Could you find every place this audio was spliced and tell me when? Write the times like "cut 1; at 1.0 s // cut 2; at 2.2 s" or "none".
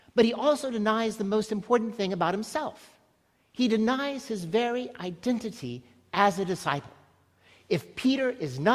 none